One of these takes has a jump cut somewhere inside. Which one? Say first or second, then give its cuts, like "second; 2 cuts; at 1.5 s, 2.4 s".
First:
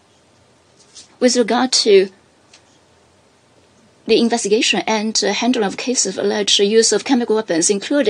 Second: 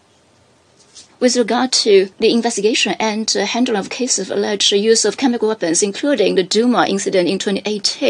second; 1 cut; at 2.1 s